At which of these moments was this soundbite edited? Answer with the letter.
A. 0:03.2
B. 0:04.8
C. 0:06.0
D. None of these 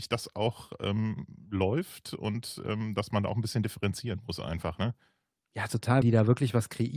C